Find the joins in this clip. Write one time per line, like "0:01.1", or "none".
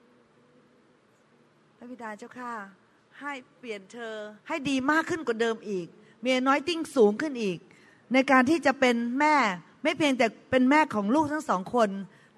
0:04.4